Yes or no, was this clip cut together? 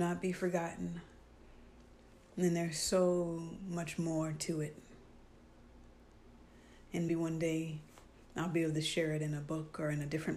yes